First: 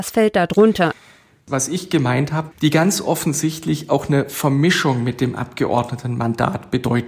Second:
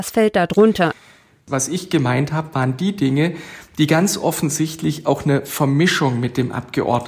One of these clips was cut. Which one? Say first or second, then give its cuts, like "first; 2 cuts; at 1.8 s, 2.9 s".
first; 1 cut; at 2.5 s